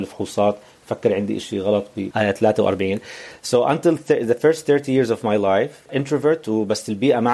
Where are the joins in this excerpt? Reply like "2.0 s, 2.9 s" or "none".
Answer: 2.1 s, 5.9 s